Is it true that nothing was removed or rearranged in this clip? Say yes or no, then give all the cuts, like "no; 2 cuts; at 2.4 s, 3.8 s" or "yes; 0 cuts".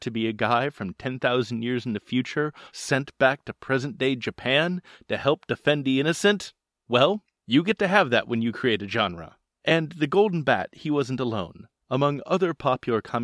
no; 1 cut; at 2.7 s